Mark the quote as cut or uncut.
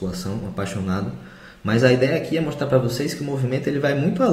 uncut